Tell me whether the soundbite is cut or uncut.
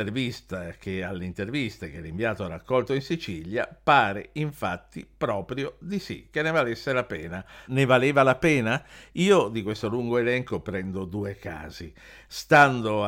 cut